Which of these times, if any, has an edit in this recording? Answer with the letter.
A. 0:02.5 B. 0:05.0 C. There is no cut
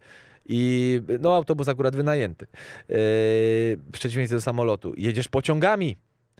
C